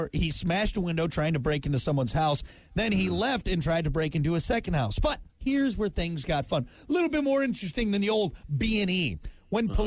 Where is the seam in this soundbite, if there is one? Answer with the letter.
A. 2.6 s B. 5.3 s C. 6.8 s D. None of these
B